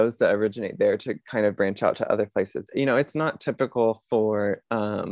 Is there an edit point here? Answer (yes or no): yes